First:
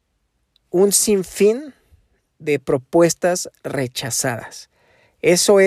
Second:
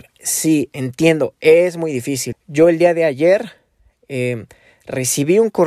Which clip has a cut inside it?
second; 1 cut; at 2.3 s

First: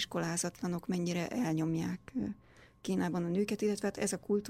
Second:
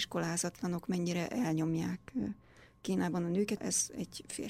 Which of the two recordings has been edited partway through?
second; 1 cut; at 3.6 s

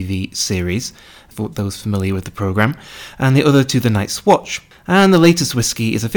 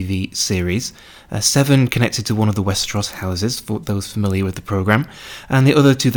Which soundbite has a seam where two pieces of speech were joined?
first; 1 cut; at 1.3 s

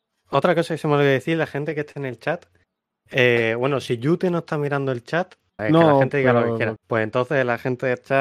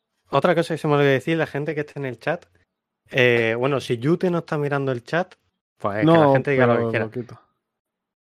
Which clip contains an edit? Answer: first; 2 cuts; at 5.6 s, 6.8 s

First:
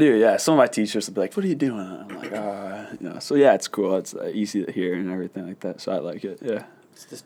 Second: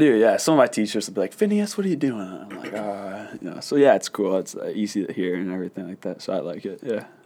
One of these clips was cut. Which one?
first; 1 cut; at 1.3 s

